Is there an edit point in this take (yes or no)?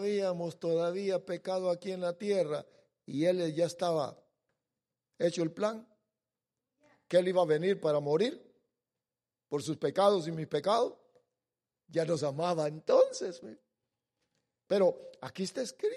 yes